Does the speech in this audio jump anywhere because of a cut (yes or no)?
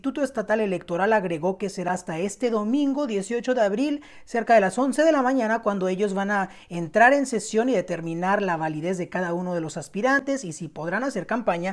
no